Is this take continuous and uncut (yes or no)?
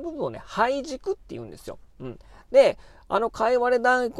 yes